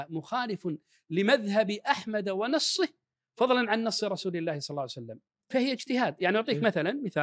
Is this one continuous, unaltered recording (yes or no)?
no